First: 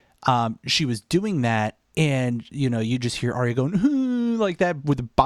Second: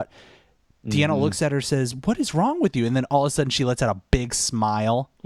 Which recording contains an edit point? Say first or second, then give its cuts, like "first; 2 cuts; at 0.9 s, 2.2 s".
first; 1 cut; at 1.8 s